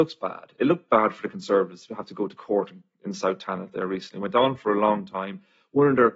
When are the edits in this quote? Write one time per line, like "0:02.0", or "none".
none